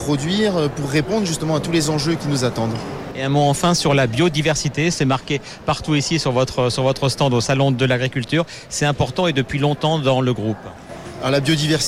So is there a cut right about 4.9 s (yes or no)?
yes